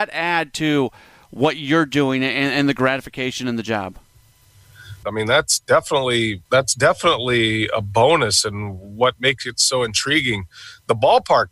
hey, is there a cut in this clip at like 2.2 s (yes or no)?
no